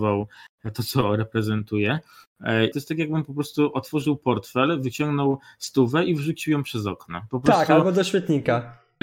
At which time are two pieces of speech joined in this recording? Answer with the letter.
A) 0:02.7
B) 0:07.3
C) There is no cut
A